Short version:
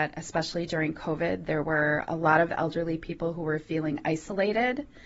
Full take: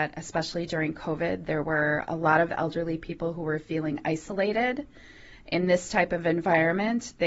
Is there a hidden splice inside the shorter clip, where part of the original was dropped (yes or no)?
no